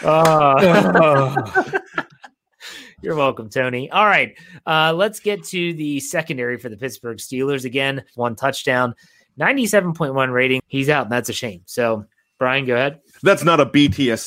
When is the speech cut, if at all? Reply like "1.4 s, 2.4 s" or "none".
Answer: 8.1 s, 10.6 s